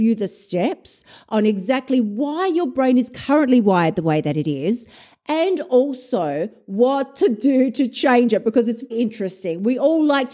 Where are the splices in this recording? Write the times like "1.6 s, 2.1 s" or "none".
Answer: 8.9 s